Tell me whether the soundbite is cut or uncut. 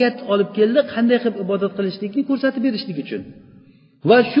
uncut